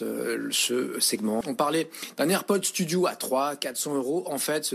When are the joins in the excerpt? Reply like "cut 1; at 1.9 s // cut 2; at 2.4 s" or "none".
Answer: cut 1; at 1.4 s